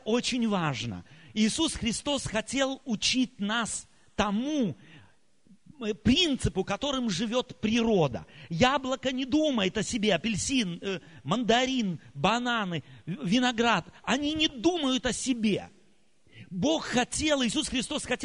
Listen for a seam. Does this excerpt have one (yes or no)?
no